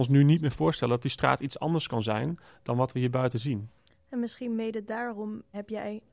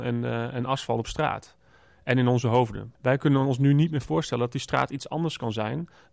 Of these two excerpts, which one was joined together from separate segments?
second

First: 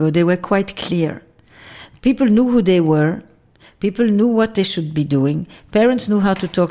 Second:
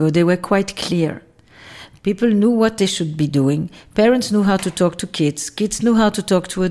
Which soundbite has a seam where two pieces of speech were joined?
second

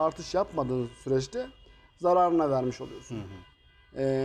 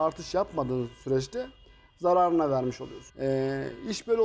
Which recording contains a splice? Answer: second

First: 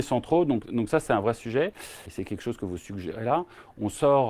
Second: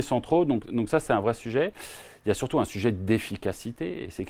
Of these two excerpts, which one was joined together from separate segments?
first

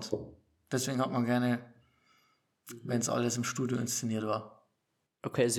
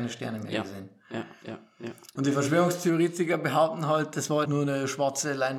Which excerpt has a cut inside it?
second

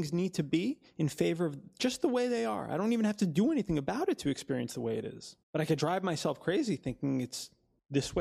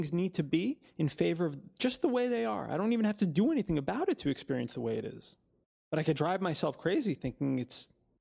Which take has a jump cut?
first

